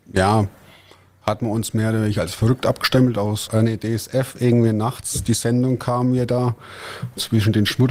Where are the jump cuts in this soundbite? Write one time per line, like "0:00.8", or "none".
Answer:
0:03.5